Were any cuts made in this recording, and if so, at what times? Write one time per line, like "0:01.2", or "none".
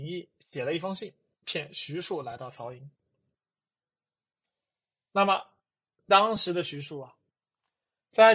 none